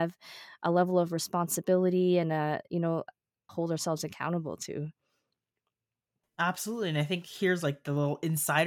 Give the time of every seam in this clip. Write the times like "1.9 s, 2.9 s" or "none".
3.5 s